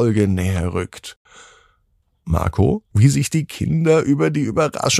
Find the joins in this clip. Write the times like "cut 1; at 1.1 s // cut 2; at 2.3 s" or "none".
cut 1; at 2.9 s